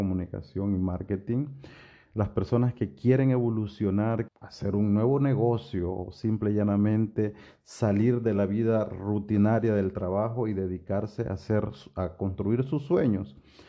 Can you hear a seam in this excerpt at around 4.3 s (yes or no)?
yes